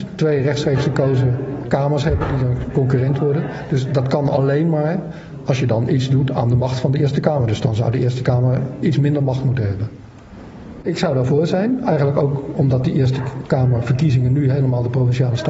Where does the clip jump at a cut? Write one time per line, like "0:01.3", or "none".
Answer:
0:01.6
0:10.8